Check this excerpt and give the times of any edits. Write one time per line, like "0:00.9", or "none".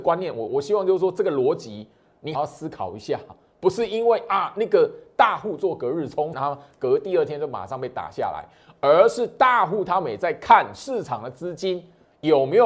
0:02.3
0:06.3